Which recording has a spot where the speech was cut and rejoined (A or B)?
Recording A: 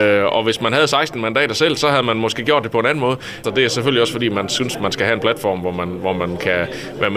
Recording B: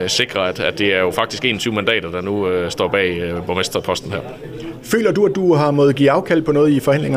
A